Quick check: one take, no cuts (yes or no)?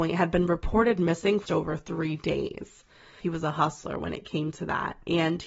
no